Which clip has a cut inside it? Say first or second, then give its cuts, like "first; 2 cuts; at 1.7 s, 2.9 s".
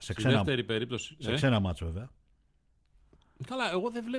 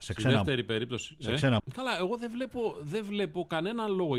second; 1 cut; at 1.6 s